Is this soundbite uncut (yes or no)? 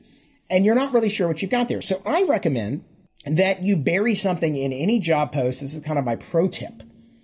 yes